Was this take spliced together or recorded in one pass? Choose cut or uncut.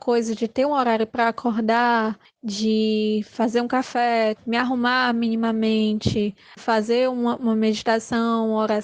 cut